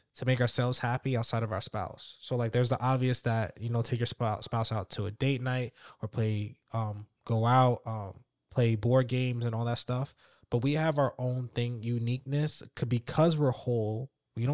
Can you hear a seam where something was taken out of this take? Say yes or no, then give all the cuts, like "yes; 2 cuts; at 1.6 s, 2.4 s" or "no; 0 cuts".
no; 0 cuts